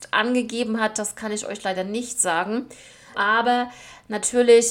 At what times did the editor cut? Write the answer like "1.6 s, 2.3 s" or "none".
3.1 s